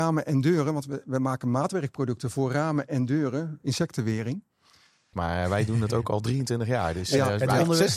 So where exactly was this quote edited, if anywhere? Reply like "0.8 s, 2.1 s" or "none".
5.1 s